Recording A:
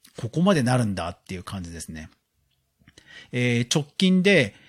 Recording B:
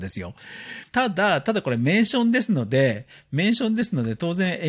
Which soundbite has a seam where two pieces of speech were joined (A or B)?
B